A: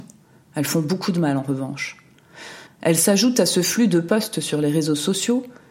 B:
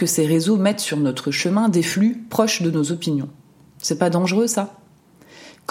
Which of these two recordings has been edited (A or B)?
A